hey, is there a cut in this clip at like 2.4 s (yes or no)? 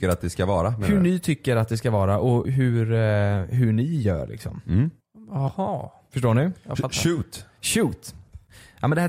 yes